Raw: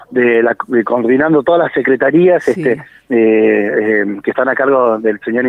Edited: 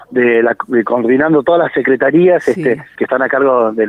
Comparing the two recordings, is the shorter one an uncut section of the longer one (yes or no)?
no